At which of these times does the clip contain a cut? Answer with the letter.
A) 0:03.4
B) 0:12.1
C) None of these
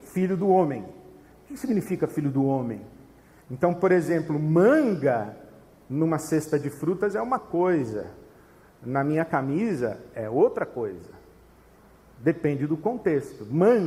A